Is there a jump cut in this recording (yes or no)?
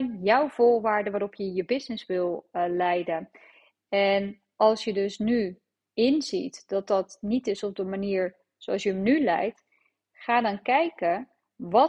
no